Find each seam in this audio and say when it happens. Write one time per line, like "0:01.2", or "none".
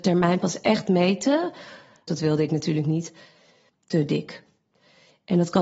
0:02.1
0:03.7